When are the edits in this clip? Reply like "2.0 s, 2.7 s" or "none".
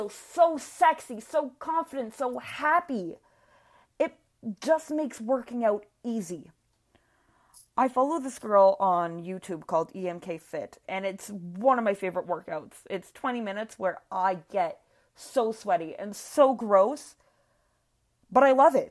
10.8 s